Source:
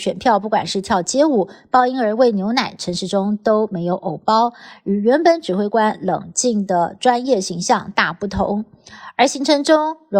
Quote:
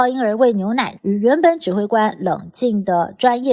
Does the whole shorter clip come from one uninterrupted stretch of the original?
no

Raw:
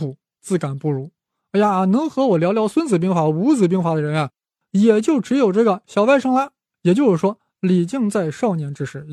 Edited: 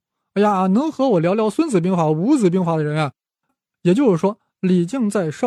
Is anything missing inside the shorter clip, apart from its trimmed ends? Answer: yes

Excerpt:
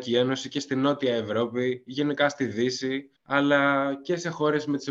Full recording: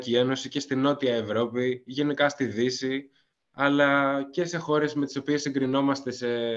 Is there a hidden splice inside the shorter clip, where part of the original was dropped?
yes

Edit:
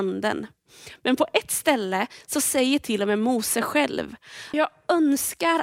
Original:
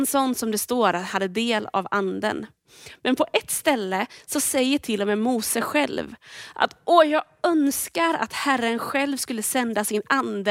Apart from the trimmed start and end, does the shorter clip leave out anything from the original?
yes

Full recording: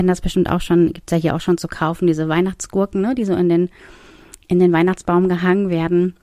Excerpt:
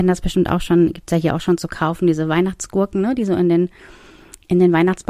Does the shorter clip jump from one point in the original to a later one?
no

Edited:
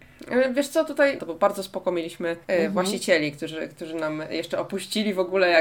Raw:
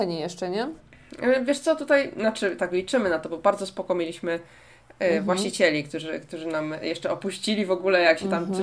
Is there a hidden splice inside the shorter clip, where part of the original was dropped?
yes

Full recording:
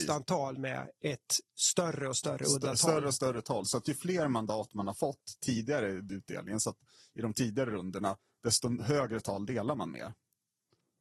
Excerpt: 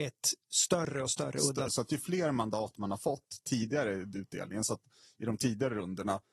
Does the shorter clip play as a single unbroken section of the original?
no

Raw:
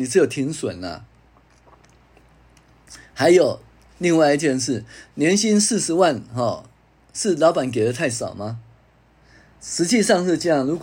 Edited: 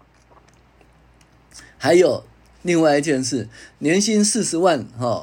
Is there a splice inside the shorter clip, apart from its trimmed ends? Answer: no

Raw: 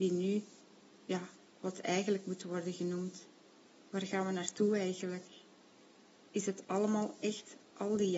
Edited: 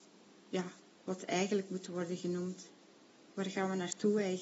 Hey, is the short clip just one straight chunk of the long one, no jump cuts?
yes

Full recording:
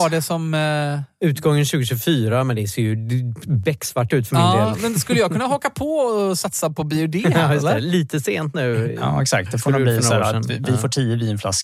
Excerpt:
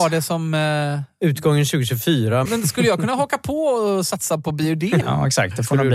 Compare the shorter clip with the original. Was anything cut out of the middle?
yes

